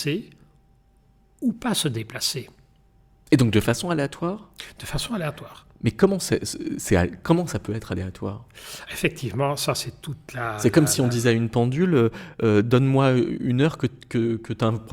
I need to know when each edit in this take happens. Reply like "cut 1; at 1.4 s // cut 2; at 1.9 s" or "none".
cut 1; at 8.9 s